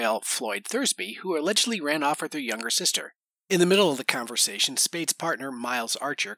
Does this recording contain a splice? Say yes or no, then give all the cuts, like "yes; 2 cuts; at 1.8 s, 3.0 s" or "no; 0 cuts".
no; 0 cuts